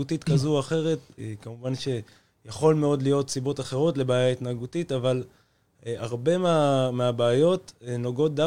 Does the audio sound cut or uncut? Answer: cut